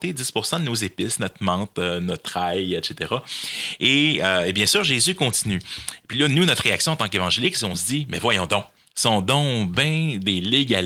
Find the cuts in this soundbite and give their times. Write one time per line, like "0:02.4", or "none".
none